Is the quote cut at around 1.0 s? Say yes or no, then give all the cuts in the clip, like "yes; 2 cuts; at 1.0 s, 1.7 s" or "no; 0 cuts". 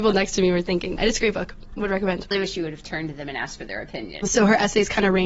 yes; 3 cuts; at 1.0 s, 2.3 s, 4.2 s